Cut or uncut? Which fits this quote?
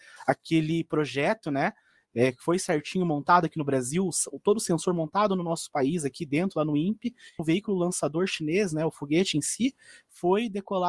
cut